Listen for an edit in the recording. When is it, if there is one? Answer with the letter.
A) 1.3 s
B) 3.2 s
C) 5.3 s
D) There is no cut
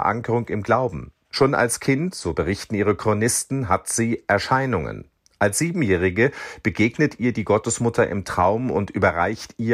A